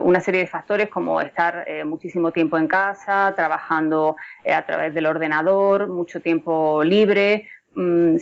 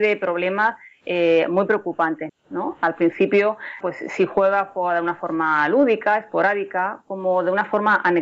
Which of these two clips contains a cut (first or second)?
second